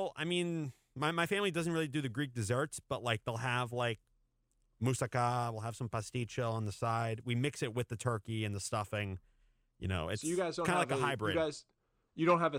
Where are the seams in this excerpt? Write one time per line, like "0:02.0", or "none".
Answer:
none